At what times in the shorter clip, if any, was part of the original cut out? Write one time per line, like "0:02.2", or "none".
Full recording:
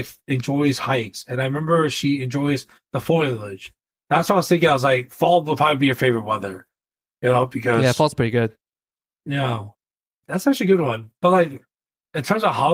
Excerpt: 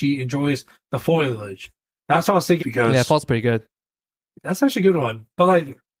0:02.6
0:04.3